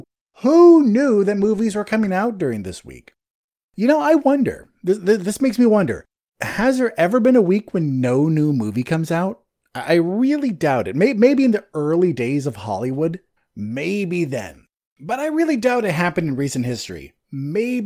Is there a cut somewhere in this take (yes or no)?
no